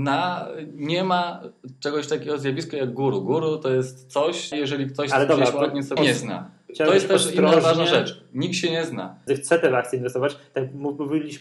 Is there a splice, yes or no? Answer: yes